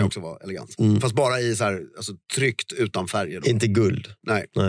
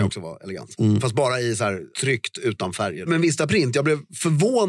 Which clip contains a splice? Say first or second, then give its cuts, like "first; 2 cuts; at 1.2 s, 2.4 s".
second; 2 cuts; at 1.9 s, 3.1 s